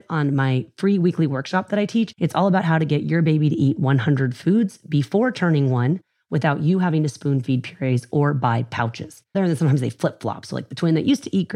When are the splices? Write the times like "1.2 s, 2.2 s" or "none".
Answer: 2.1 s, 9.3 s